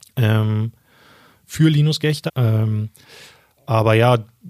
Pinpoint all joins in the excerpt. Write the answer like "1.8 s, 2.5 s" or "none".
2.3 s